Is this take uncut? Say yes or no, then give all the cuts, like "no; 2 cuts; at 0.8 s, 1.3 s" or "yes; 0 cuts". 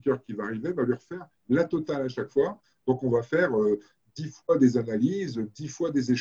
yes; 0 cuts